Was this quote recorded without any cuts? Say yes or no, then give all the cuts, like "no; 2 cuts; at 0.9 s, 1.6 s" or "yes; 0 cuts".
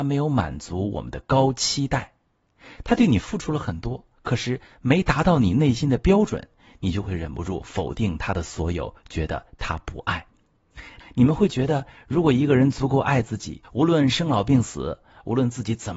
no; 2 cuts; at 11.0 s, 13.6 s